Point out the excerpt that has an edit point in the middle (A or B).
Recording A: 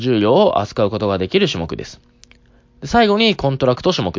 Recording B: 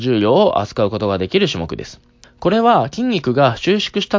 B